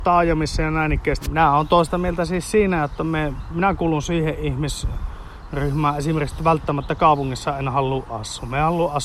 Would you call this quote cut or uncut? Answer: cut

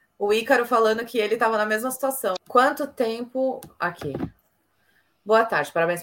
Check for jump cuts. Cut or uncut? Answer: cut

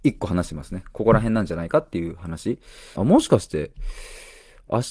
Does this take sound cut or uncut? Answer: cut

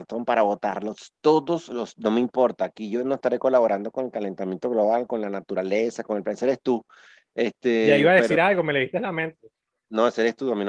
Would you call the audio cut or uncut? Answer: uncut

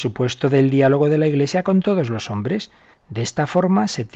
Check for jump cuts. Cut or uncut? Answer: cut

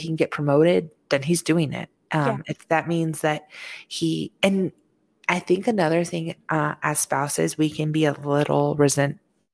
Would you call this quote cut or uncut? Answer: uncut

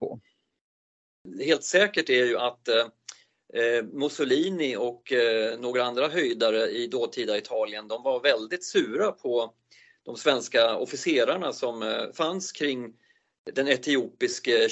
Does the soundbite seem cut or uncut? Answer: uncut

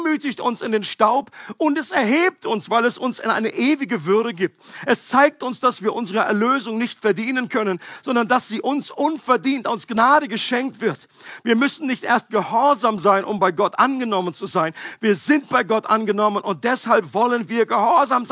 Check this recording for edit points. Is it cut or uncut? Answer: uncut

